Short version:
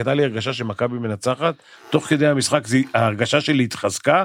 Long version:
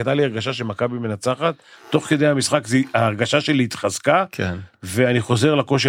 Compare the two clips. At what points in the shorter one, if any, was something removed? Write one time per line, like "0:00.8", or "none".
none